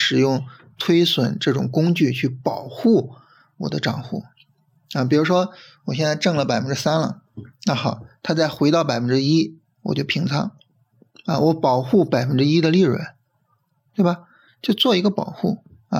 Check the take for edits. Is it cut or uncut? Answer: uncut